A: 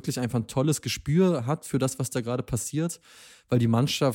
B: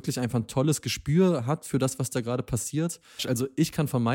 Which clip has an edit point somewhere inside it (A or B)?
B